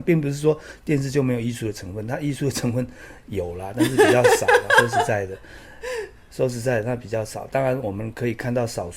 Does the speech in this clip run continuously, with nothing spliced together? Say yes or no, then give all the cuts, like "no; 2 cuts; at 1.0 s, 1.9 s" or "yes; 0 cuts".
yes; 0 cuts